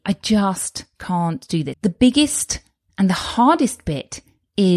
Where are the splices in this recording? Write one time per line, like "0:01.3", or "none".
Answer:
0:01.7